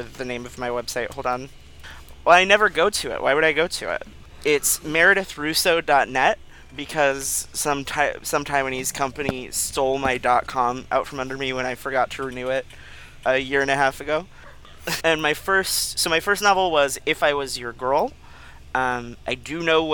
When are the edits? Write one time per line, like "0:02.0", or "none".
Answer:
0:15.0